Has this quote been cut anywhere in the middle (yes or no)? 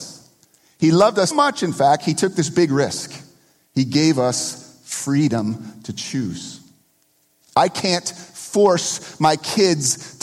yes